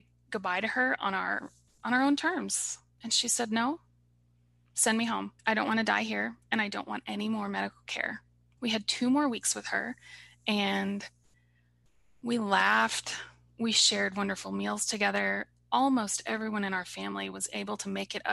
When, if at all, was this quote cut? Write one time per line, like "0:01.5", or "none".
0:03.0
0:05.4
0:08.6